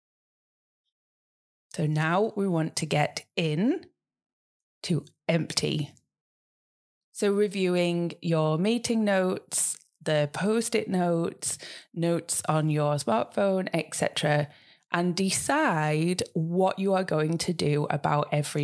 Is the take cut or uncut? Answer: uncut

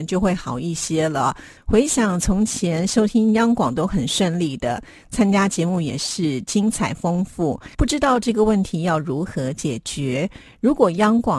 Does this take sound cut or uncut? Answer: cut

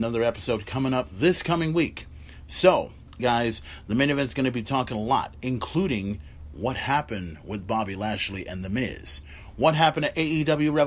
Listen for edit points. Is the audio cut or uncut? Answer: cut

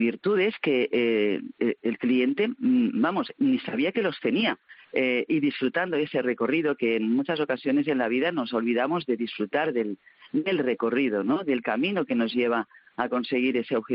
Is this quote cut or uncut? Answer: cut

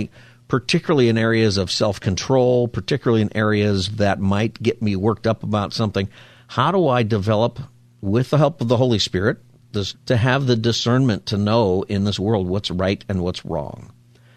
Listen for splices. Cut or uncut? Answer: cut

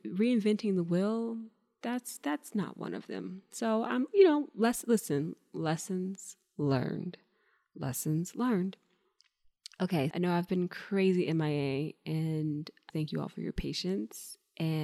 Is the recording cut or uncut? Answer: cut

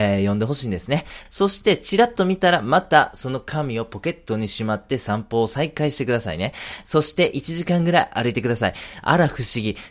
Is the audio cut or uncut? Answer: uncut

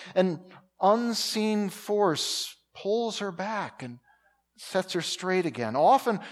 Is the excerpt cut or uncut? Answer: uncut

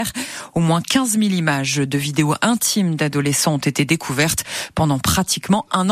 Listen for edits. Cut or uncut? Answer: uncut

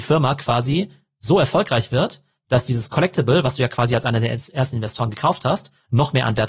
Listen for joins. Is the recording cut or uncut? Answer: uncut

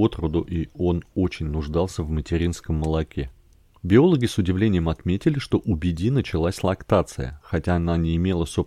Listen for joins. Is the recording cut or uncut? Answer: uncut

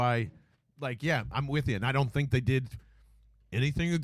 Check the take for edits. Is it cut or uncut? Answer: uncut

